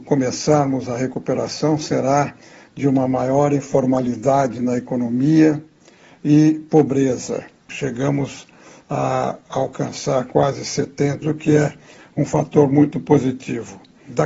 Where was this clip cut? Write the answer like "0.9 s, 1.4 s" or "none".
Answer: 7.7 s, 11.2 s